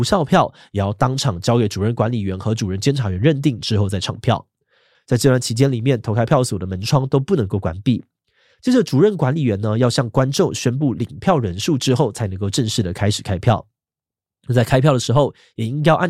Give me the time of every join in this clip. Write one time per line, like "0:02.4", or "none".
0:04.9